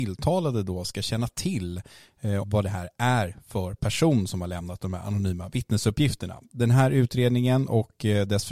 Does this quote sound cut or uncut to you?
cut